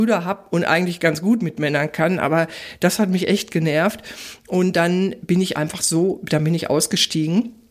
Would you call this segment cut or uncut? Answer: uncut